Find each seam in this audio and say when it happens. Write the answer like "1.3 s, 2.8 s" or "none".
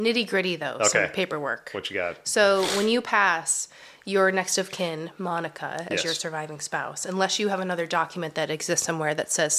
none